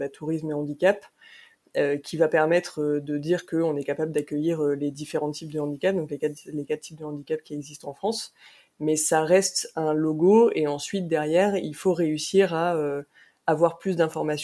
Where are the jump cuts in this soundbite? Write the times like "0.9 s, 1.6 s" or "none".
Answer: none